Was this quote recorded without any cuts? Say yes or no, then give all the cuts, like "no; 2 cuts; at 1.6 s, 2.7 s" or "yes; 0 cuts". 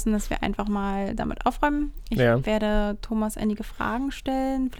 yes; 0 cuts